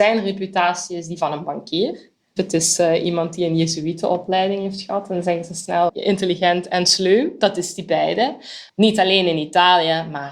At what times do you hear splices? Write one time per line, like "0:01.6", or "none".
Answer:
0:05.9
0:08.7